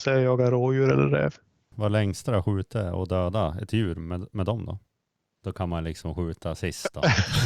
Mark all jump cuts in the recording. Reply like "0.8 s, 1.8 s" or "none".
1.7 s, 5.4 s